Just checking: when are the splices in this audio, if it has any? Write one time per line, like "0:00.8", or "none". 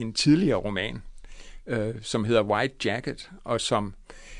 none